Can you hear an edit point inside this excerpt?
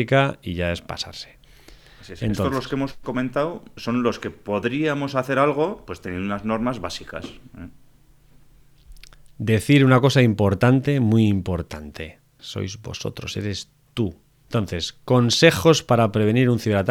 yes; 2 cuts; at 12.4 s, 14.4 s

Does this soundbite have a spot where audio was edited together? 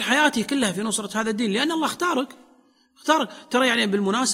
no; 0 cuts

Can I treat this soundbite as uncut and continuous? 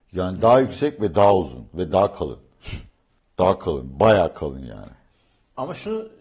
yes; 0 cuts

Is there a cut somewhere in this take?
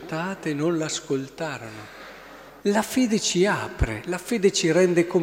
yes; 1 cut; at 2.6 s

